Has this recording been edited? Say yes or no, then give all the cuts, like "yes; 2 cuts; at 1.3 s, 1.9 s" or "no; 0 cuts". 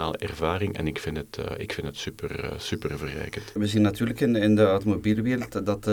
yes; 1 cut; at 3.6 s